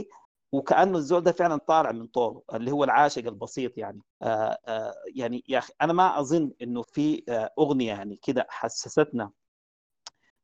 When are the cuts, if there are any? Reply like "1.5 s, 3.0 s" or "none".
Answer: 1.6 s, 4.1 s, 6.8 s